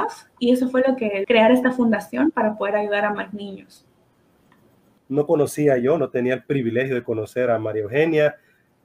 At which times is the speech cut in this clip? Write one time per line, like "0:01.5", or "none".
0:01.2
0:05.0